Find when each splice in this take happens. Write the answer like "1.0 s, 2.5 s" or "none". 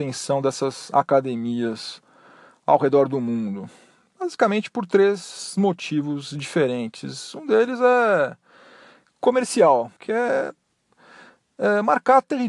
10.0 s